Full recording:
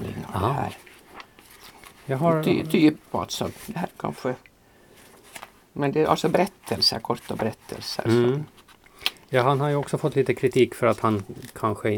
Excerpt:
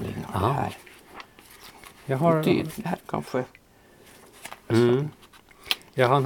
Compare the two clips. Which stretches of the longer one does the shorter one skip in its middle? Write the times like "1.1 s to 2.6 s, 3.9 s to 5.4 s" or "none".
2.7 s to 3.6 s, 5.6 s to 8.0 s